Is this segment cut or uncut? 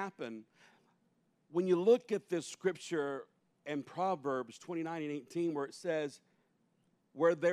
uncut